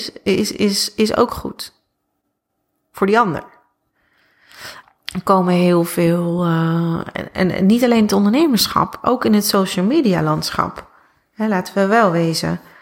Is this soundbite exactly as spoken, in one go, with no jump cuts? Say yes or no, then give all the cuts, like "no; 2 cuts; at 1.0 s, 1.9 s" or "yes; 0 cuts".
no; 1 cut; at 4.8 s